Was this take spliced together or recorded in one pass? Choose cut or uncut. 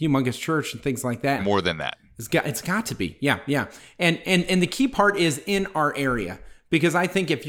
cut